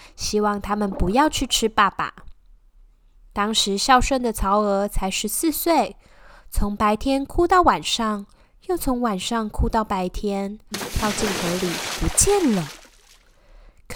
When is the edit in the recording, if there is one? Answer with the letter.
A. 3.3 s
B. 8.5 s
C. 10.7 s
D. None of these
C